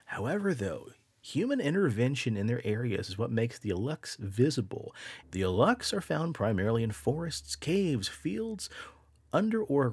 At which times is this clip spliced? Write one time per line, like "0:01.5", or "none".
0:05.2